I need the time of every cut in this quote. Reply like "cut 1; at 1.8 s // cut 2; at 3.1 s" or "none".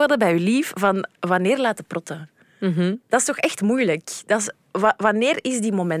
none